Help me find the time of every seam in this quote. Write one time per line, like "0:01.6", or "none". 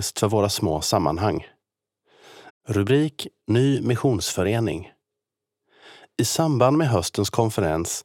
0:02.5